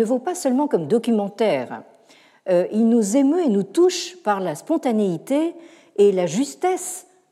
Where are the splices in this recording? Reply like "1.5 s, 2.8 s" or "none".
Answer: none